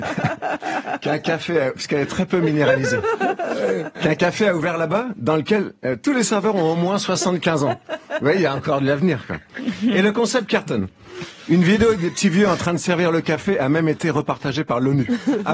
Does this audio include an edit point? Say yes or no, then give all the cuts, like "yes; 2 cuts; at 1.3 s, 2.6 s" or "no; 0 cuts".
no; 0 cuts